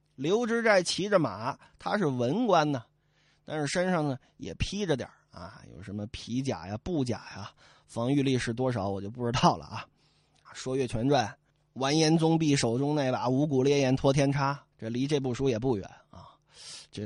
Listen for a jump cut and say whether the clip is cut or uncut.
cut